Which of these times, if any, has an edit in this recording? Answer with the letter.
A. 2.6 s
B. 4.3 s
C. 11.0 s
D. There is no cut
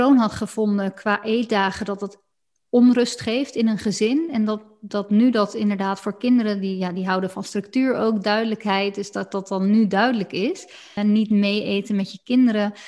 C